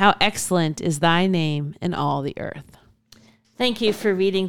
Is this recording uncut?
yes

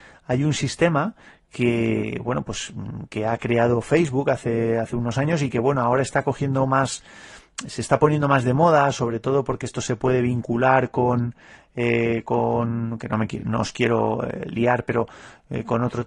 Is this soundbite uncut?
yes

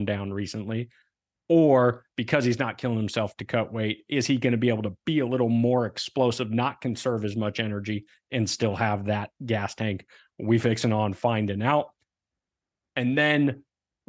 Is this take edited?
no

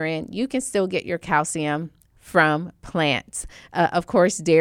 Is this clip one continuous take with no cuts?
yes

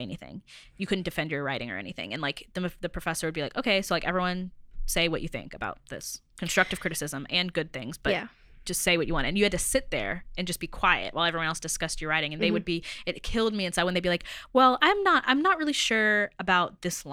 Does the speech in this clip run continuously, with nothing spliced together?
yes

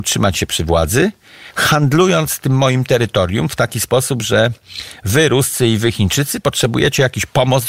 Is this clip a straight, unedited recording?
yes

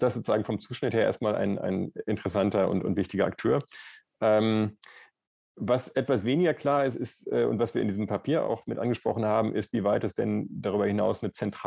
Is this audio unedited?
no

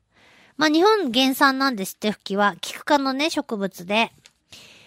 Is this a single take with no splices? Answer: yes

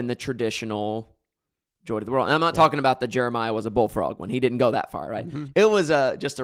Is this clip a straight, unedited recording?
no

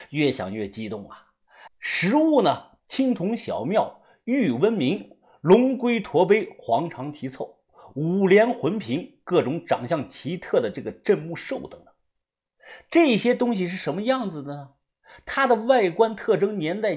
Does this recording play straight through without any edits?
no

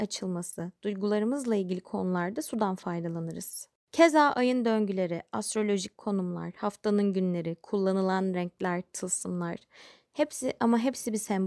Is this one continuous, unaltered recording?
yes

